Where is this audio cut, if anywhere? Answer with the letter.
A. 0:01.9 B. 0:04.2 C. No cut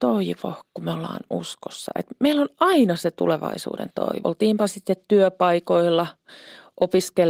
B